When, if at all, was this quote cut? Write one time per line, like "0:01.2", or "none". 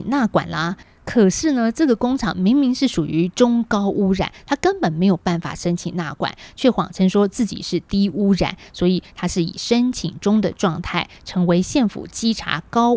none